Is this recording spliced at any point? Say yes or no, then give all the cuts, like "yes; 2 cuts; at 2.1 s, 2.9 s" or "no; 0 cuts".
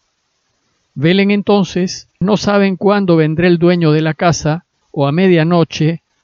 yes; 2 cuts; at 2.2 s, 4.8 s